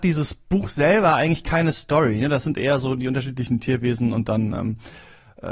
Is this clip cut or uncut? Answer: uncut